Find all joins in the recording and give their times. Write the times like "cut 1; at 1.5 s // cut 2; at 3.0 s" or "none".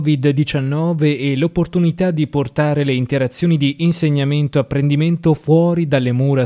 none